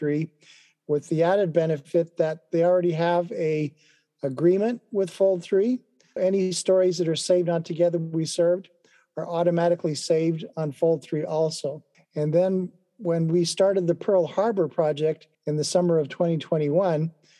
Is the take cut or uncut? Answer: cut